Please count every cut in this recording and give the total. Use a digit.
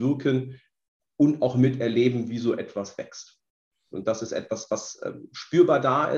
1